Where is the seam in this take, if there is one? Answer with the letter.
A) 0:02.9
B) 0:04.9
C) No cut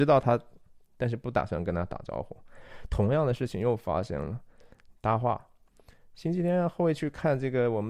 B